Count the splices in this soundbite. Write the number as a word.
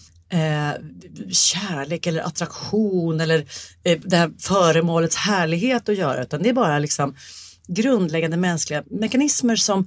one